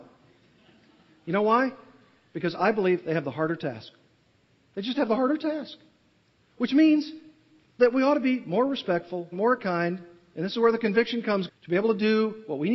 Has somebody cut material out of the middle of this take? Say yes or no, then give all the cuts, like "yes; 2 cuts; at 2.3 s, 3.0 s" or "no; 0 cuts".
yes; 2 cuts; at 9.3 s, 11.5 s